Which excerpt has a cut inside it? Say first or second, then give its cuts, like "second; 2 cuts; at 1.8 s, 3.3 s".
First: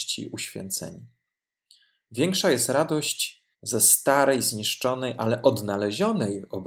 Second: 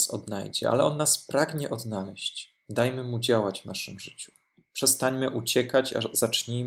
first; 1 cut; at 3.5 s